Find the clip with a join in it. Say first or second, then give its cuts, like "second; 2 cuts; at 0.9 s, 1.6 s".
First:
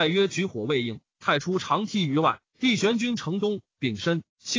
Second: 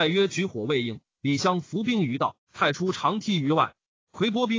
first; 2 cuts; at 1.1 s, 2.5 s